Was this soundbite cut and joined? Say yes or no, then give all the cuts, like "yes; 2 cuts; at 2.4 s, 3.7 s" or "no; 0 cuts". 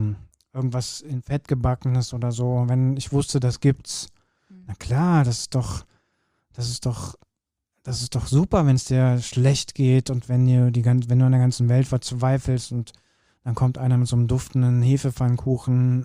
no; 0 cuts